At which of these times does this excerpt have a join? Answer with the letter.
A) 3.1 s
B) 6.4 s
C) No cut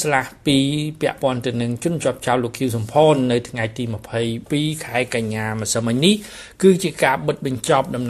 C